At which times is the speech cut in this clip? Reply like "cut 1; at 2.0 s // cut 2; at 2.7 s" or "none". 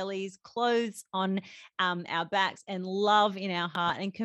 none